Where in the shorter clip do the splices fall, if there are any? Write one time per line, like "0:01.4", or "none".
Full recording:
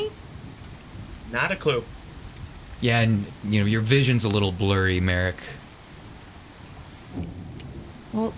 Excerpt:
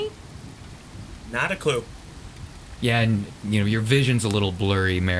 none